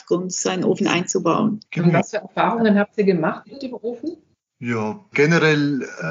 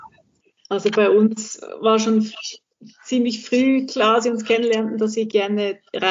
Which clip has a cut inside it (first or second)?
first